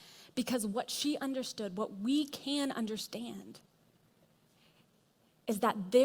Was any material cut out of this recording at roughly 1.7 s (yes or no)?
no